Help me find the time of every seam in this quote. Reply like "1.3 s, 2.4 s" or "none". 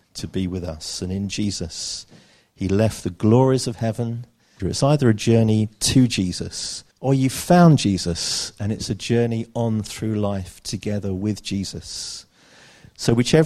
4.6 s, 6.9 s